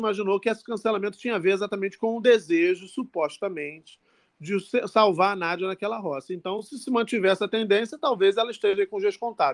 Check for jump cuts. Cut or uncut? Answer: uncut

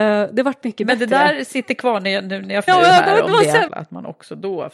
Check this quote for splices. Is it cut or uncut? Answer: cut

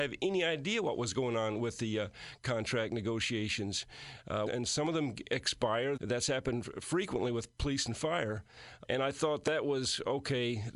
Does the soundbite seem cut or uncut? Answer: cut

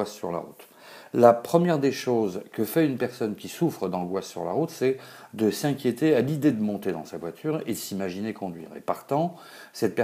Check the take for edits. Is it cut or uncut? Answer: uncut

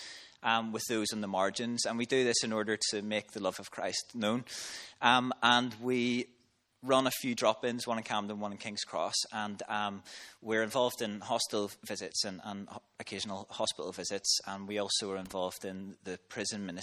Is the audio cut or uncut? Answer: uncut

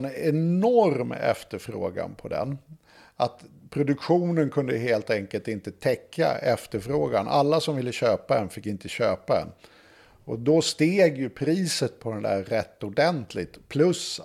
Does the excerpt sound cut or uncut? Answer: uncut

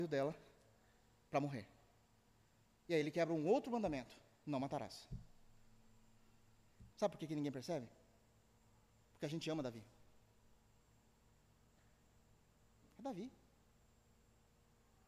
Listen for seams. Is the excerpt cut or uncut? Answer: cut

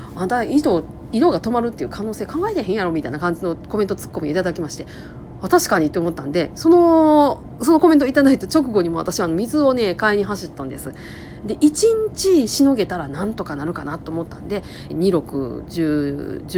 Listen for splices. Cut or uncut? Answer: cut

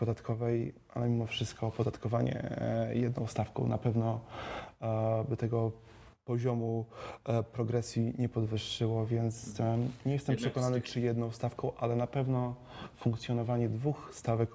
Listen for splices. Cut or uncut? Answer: uncut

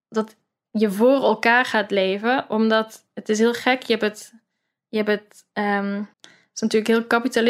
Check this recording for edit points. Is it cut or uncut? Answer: cut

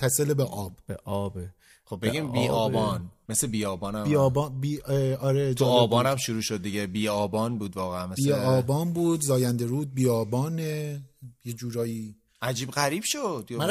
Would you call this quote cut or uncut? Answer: uncut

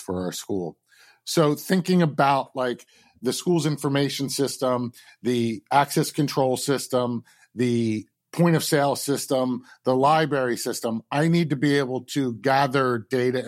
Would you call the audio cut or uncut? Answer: uncut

